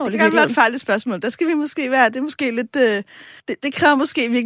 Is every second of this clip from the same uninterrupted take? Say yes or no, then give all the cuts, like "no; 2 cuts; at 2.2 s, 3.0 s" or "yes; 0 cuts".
no; 1 cut; at 3.4 s